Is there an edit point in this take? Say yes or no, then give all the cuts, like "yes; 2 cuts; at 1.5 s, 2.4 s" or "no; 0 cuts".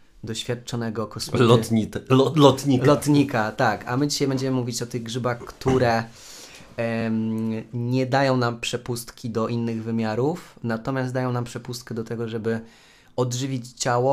no; 0 cuts